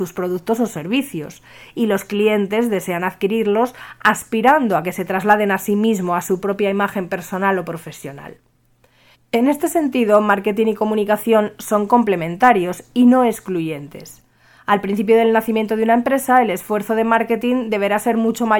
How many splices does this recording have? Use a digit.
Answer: 1